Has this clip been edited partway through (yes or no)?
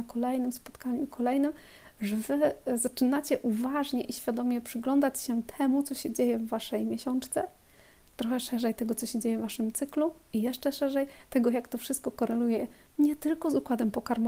no